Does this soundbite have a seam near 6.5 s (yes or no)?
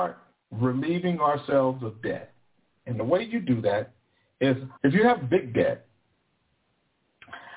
no